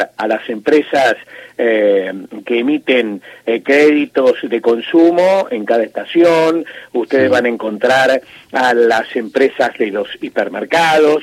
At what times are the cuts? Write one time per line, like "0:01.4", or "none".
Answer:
none